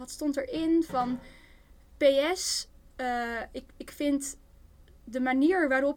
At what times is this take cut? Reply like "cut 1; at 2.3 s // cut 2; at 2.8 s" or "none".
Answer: none